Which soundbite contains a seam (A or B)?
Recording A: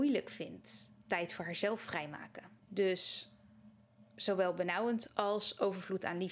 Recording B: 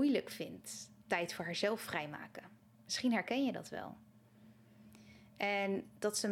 A